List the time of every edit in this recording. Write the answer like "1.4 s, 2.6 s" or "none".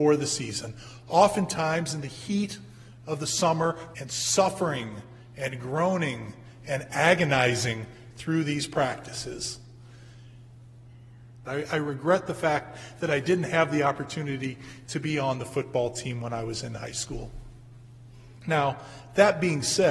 3.9 s, 11.5 s